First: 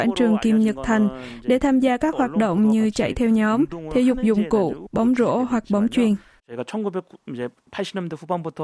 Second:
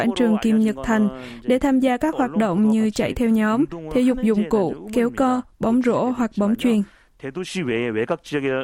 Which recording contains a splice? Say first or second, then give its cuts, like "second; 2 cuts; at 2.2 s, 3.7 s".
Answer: first; 2 cuts; at 4.9 s, 6.4 s